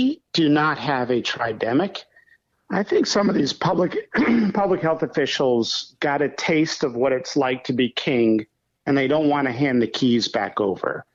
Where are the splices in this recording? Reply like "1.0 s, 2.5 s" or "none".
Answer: 2.5 s